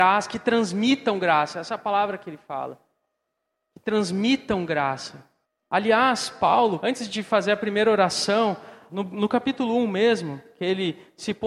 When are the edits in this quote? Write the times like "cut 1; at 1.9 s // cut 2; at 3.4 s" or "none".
cut 1; at 5.6 s // cut 2; at 6.8 s // cut 3; at 8.9 s